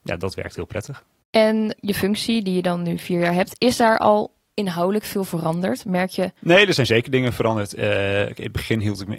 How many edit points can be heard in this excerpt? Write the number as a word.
one